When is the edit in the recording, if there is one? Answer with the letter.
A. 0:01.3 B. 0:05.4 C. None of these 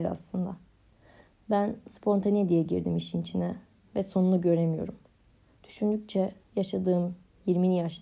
C